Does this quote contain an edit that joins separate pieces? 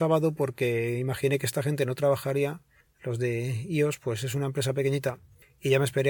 no; 0 cuts

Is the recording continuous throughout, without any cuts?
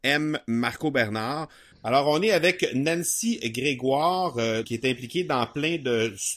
no; 2 cuts; at 1.7 s, 4.6 s

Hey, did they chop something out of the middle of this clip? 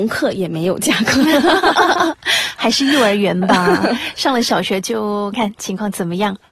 yes; 1 cut; at 5.3 s

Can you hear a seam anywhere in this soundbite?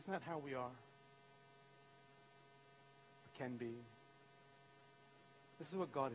no; 0 cuts

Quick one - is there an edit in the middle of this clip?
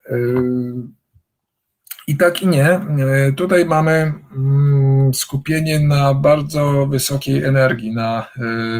no; 0 cuts

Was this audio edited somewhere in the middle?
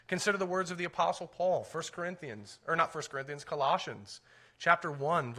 no; 0 cuts

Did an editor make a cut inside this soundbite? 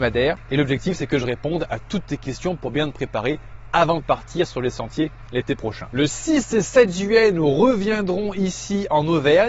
no; 0 cuts

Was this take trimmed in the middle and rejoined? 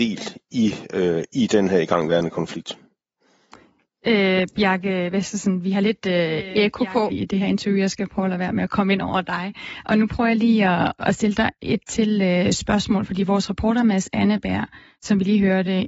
yes; 2 cuts; at 7.1 s, 11.0 s

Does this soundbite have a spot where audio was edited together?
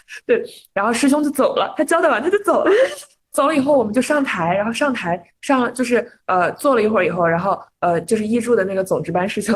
no; 0 cuts

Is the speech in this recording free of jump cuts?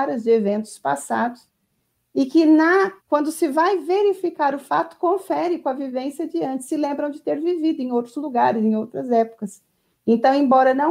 no; 1 cut; at 3.0 s

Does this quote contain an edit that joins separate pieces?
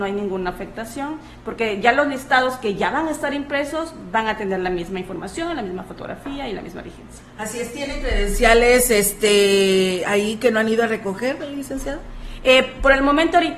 no; 0 cuts

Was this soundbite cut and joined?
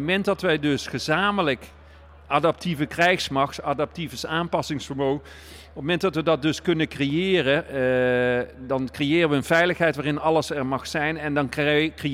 no; 0 cuts

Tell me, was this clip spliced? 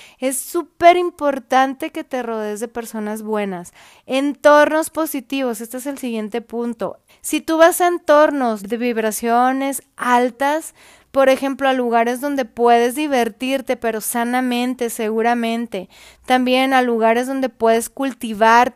yes; 2 cuts; at 7.1 s, 8.6 s

